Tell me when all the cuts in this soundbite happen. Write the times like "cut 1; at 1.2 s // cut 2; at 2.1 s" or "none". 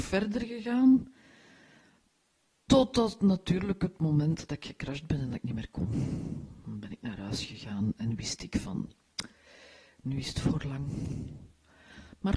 none